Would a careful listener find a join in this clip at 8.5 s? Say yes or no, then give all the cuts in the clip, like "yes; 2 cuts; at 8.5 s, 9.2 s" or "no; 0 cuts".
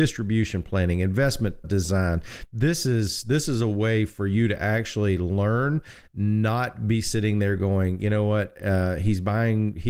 no; 1 cut; at 1.6 s